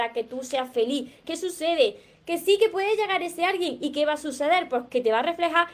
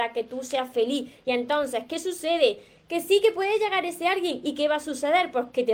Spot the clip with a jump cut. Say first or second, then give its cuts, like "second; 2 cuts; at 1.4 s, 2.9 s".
first; 1 cut; at 1.2 s